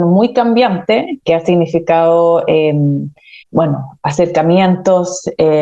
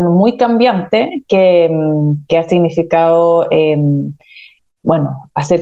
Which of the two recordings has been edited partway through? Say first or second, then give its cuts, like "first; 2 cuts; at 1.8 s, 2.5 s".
first; 2 cuts; at 1.2 s, 3.4 s